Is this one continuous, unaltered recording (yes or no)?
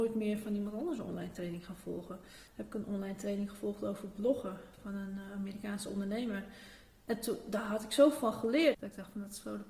no